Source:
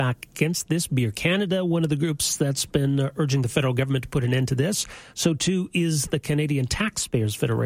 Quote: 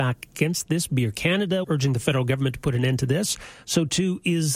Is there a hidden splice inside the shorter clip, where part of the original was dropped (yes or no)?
yes